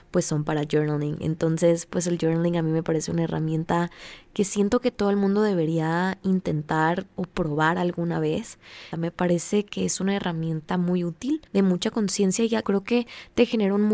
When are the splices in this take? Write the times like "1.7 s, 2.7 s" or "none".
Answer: 11.5 s, 12.6 s

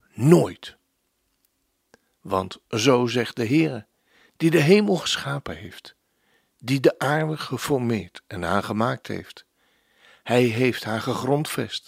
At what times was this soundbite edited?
6.5 s

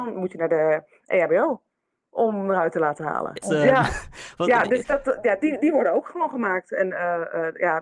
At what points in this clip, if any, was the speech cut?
3.4 s

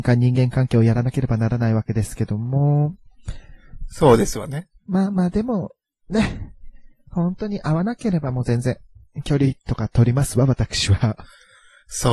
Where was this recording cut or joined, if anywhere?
none

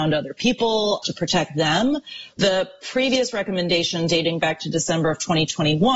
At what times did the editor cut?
2.4 s

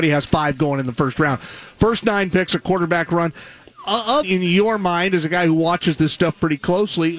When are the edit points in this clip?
4.2 s

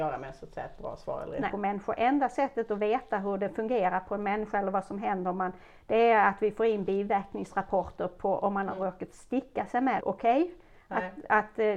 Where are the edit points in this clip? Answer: 1.5 s, 10.0 s

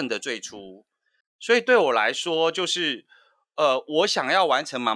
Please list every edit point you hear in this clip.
1.2 s

